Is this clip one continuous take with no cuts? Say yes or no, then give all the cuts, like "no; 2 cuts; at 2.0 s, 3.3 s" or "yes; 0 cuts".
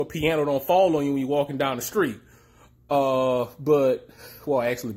yes; 0 cuts